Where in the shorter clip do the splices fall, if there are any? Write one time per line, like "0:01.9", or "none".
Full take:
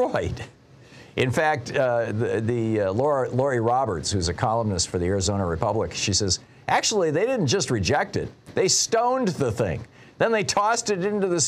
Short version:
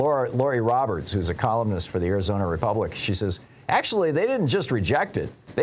none